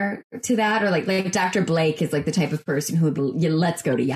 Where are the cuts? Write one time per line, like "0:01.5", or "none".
0:03.2

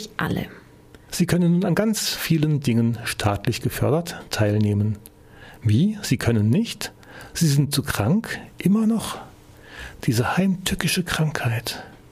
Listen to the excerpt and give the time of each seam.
0:01.1

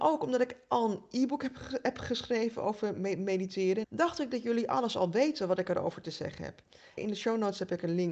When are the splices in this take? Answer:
0:03.8
0:07.0

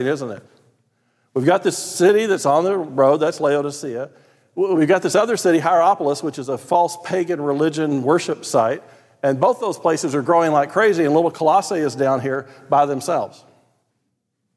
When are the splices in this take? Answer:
none

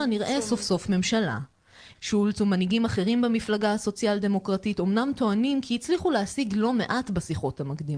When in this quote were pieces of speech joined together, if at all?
0:01.9

